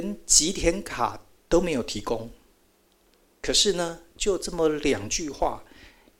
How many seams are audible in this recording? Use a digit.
0